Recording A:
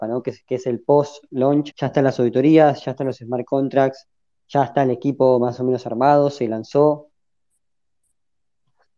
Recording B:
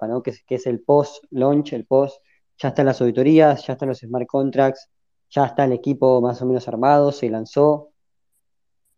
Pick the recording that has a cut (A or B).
A